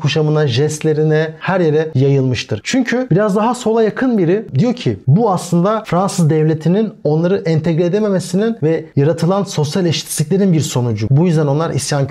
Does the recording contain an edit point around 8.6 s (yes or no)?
no